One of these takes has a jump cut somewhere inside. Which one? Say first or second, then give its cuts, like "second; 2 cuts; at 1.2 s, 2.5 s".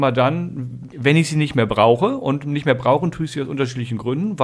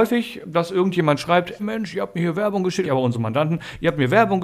second; 2 cuts; at 1.6 s, 2.8 s